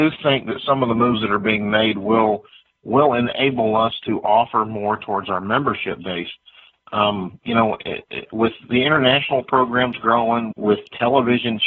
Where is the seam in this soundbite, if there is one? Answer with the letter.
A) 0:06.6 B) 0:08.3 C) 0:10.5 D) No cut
C